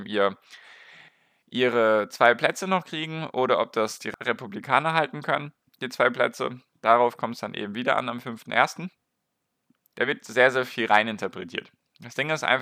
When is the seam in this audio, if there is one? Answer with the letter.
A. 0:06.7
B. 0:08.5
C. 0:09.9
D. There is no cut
C